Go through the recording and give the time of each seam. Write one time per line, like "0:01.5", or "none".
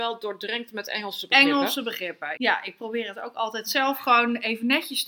0:02.4